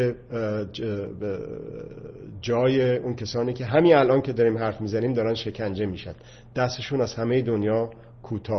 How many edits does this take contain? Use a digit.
0